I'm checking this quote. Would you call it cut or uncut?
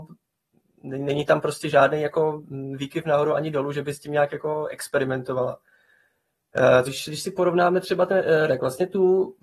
cut